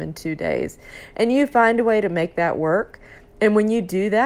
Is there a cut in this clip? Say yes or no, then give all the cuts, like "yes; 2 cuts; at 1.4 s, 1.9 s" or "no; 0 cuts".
no; 0 cuts